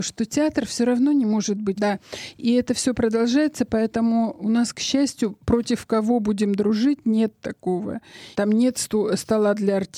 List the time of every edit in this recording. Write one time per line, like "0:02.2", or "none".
0:01.8
0:08.3